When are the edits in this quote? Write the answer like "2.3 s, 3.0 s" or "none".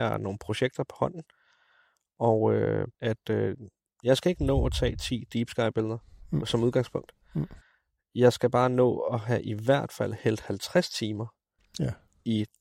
2.9 s